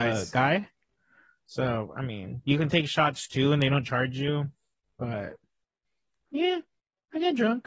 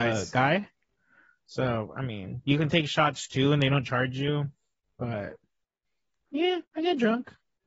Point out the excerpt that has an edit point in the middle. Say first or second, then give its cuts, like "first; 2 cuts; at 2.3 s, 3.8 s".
second; 1 cut; at 6.7 s